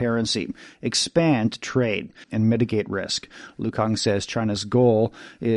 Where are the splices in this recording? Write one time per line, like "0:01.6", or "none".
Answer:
0:02.2